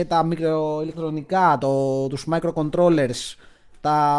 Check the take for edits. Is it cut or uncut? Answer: uncut